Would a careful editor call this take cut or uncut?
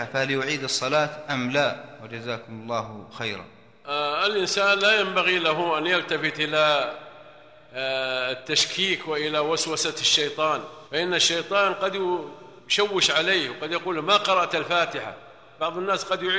cut